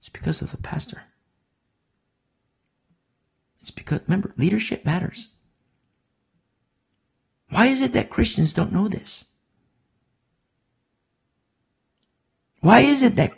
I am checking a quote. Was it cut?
no; 0 cuts

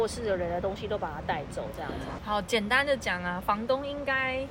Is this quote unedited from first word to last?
no; 1 cut; at 2.2 s

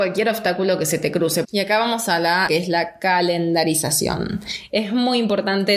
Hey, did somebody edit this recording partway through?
yes; 2 cuts; at 1.4 s, 2.5 s

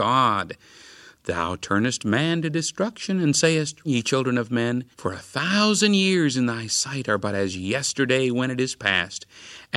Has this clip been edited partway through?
yes; 2 cuts; at 3.8 s, 4.9 s

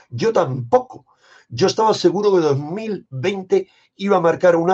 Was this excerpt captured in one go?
yes; 0 cuts

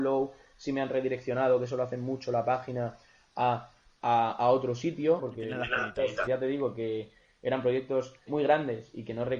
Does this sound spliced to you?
yes; 3 cuts; at 5.2 s, 6.3 s, 8.3 s

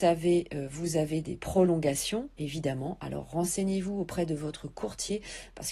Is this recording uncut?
yes; 0 cuts

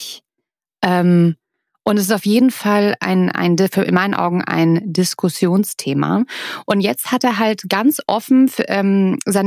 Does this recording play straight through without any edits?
no; 1 cut; at 6.7 s

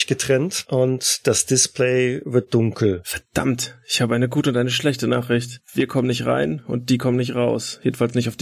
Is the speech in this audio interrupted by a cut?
no; 0 cuts

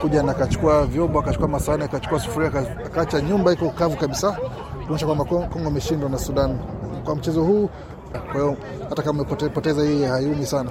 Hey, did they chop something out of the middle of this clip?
yes; 1 cut; at 8.1 s

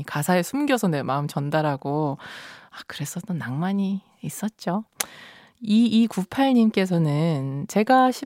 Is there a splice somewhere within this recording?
no; 0 cuts

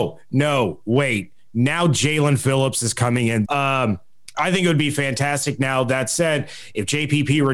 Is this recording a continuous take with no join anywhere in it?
no; 1 cut; at 3.5 s

